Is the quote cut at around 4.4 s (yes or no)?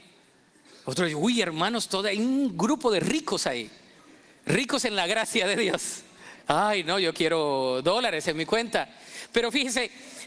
no